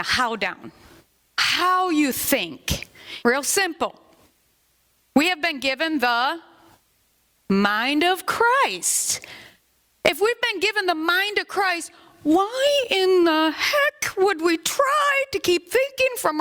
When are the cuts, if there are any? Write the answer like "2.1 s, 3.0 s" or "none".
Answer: 1.2 s, 3.2 s